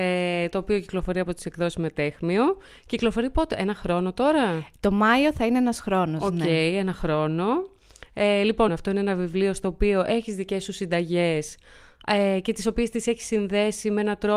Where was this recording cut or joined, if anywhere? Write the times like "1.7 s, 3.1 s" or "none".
8.7 s